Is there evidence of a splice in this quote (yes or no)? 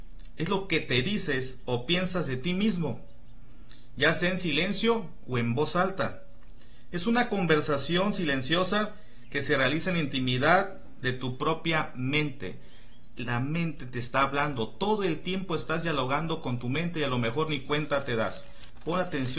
no